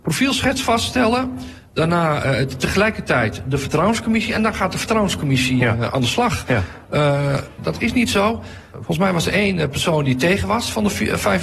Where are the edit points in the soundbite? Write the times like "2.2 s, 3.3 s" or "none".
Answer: 7.6 s, 8.7 s